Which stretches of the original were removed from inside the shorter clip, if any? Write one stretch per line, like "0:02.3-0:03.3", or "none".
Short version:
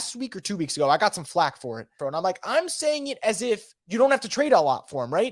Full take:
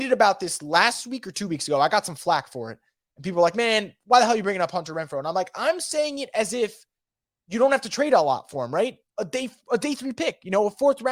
0:02.9-0:05.1
0:06.9-0:07.4